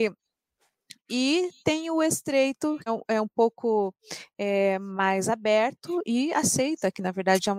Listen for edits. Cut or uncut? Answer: cut